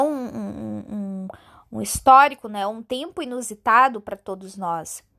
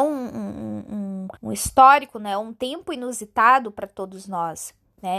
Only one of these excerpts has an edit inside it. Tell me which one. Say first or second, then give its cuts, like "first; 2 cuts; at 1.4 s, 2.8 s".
second; 1 cut; at 1.4 s